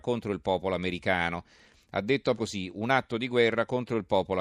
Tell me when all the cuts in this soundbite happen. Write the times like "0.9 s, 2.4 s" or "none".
2.4 s

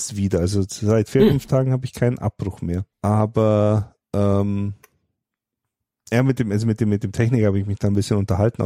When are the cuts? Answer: 2.9 s

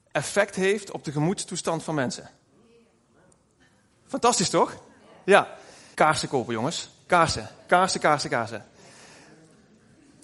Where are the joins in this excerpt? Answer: 5.9 s

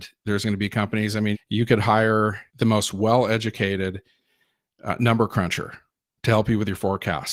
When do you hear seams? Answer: 1.3 s, 2.5 s

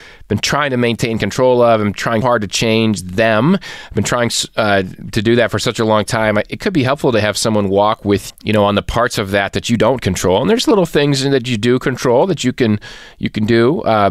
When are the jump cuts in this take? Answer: 2.2 s, 8.3 s

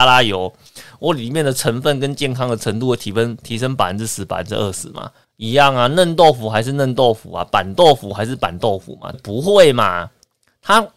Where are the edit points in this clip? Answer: 5.2 s, 9.1 s

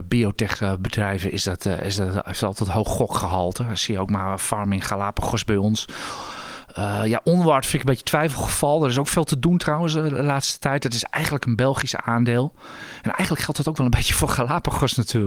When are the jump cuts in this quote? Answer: none

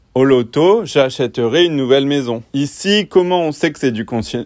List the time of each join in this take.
2.5 s

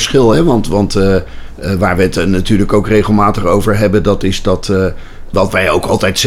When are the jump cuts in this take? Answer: 5.3 s

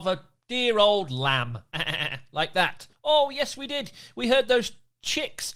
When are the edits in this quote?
2.9 s

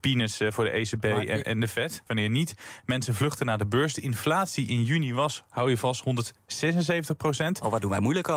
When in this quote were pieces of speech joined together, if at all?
2.1 s

